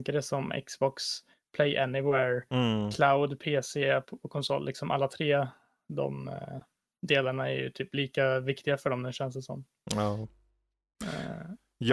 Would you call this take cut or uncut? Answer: uncut